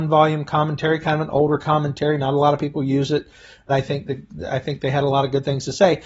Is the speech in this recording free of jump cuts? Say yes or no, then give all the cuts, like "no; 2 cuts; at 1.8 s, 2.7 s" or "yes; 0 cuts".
no; 1 cut; at 3.7 s